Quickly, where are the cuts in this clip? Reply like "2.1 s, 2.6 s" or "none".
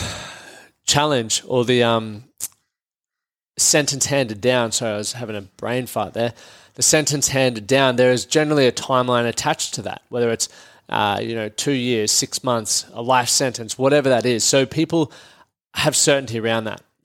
none